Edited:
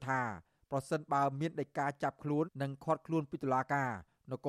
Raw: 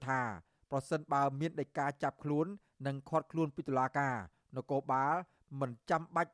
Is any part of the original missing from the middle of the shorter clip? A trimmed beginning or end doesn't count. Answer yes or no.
yes